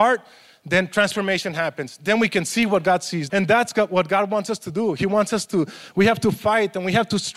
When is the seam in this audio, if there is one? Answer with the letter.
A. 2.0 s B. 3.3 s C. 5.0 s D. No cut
B